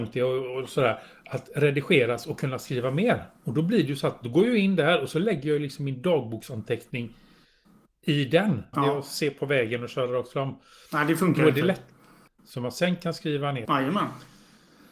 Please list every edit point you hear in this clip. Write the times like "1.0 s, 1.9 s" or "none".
8.7 s, 12.3 s, 13.6 s